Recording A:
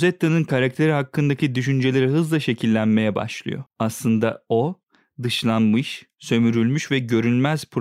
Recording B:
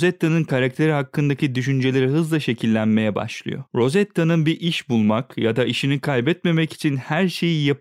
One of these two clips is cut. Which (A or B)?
A